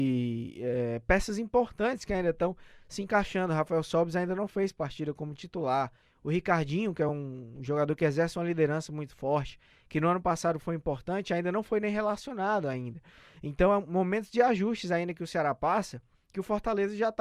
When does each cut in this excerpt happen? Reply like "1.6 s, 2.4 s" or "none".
none